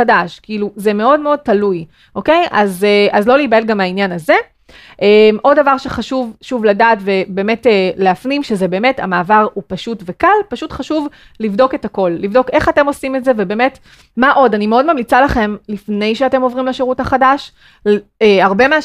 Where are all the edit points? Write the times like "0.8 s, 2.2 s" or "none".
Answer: 14.1 s

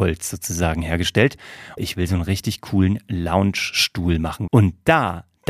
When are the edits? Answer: 1.8 s, 4.5 s

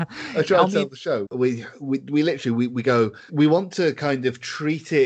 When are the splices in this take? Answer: 1.3 s, 3.3 s

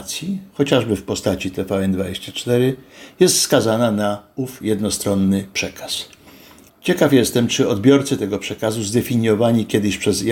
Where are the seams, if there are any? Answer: 6.7 s

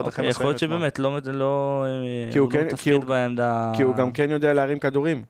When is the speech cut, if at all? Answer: none

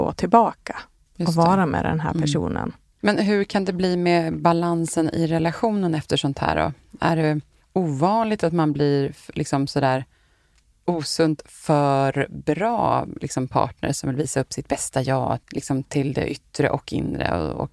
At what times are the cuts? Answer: 15.4 s

